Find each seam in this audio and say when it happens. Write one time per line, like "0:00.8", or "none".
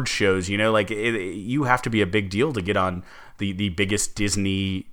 none